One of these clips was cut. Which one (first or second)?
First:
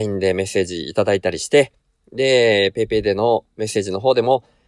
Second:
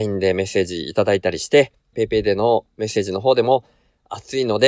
second